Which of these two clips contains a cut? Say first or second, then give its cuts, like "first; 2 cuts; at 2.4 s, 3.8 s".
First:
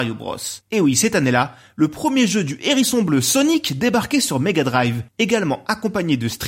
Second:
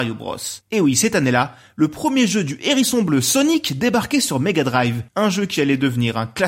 second; 1 cut; at 5.1 s